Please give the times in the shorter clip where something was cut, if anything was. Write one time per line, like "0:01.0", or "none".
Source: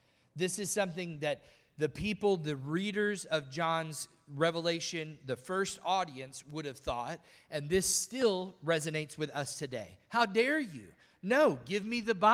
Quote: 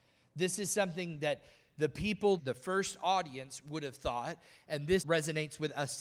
0:02.4
0:05.0